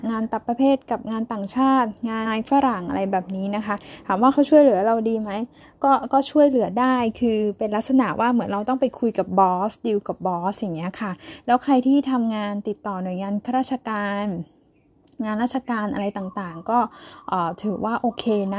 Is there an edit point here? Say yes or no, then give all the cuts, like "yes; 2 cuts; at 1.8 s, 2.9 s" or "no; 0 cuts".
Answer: yes; 1 cut; at 2.2 s